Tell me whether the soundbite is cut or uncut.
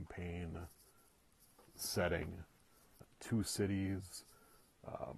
cut